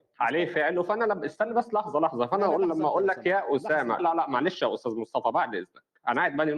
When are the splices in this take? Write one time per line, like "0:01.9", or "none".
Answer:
0:04.0